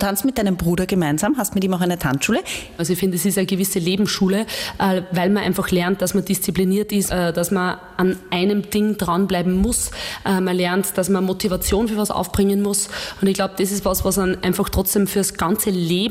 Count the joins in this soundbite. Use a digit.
2